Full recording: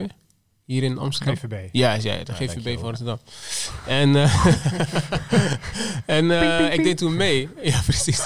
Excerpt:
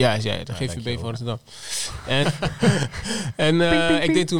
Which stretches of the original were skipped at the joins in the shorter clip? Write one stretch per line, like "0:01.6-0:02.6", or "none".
0:04.0-0:04.9